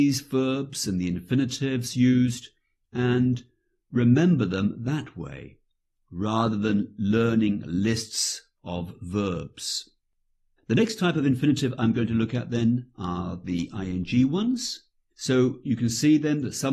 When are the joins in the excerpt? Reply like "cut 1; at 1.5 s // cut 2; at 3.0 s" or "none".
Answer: cut 1; at 15.1 s